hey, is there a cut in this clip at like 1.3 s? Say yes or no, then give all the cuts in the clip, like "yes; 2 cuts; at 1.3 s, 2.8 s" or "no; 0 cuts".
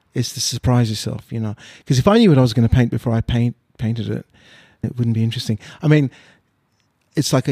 no; 1 cut; at 4.8 s